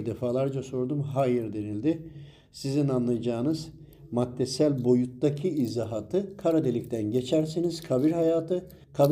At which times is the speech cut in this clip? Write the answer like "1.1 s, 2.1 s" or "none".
none